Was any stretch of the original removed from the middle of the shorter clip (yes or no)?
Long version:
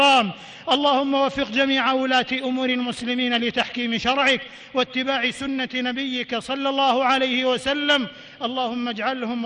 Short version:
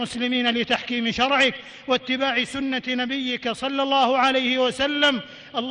no